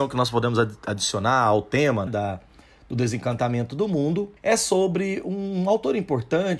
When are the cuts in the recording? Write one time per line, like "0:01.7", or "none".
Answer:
0:02.1
0:04.4